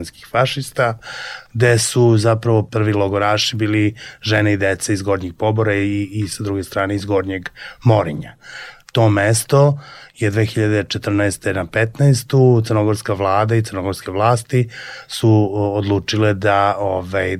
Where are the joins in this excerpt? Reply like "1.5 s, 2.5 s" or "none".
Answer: none